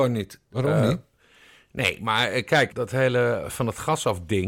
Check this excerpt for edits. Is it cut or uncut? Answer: cut